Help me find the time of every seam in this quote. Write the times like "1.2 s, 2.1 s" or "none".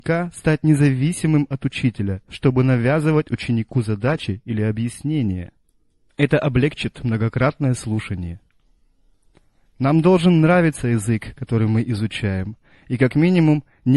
2.3 s, 6.1 s